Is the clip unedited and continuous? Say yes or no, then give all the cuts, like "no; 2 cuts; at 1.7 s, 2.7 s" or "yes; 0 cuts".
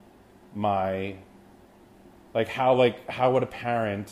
yes; 0 cuts